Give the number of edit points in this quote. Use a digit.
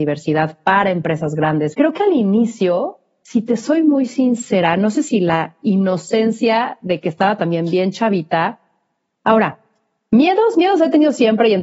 2